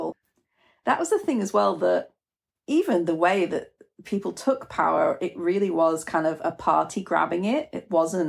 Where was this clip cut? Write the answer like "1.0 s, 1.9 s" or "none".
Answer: none

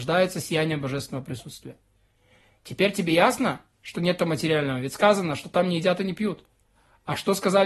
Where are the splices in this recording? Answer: none

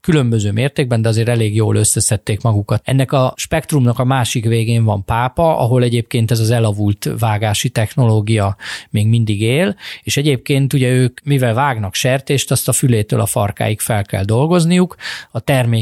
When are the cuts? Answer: 2.8 s

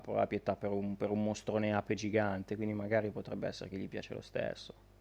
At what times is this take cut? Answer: none

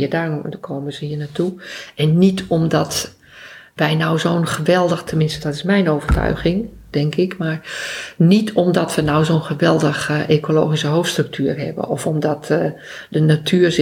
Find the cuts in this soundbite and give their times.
6.9 s

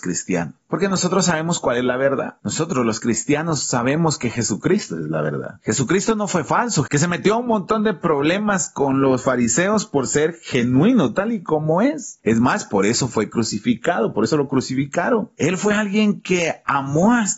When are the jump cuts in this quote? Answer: 6.9 s

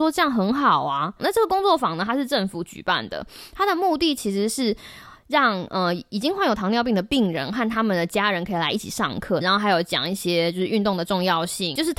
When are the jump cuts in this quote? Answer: 1.2 s, 9.4 s

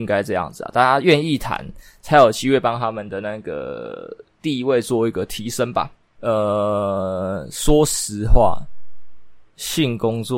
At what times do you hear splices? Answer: 6.2 s

